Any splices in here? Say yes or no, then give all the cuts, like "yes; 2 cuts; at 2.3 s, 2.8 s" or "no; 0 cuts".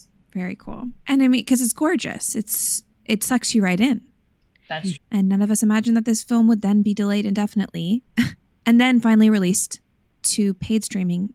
yes; 2 cuts; at 1.0 s, 4.9 s